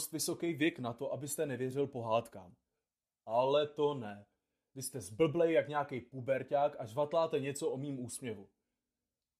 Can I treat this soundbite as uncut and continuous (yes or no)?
yes